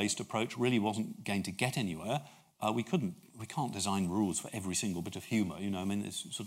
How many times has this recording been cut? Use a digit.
0